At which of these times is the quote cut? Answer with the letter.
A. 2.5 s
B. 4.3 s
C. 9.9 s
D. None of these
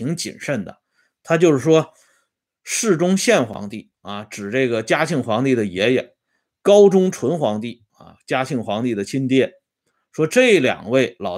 D